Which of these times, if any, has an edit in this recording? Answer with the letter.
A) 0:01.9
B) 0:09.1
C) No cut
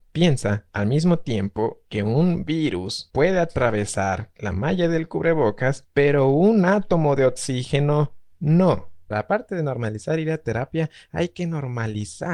B